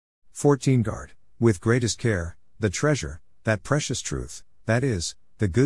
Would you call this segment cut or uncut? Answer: cut